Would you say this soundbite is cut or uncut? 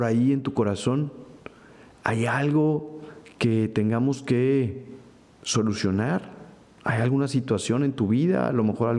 uncut